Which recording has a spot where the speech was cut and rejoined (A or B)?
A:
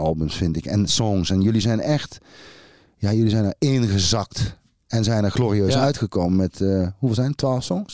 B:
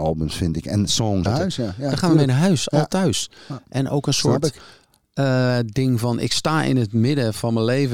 B